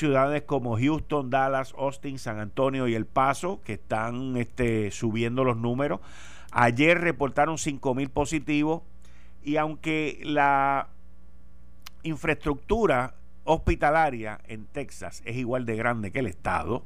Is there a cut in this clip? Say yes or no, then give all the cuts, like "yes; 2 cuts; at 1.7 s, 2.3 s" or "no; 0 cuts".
no; 0 cuts